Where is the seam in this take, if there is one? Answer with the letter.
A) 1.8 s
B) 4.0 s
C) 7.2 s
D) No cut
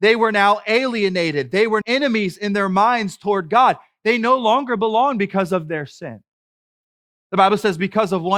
A